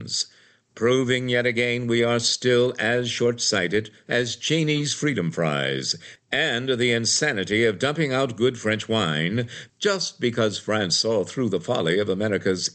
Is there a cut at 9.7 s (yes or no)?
no